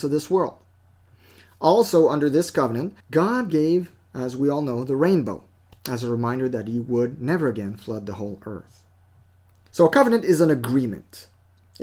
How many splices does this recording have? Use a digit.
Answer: 2